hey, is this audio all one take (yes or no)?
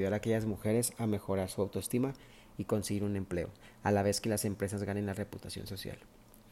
yes